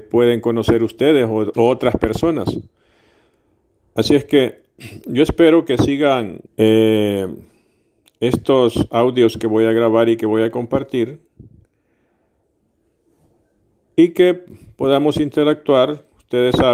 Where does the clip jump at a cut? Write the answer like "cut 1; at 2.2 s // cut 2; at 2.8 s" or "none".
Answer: cut 1; at 1.5 s // cut 2; at 6.5 s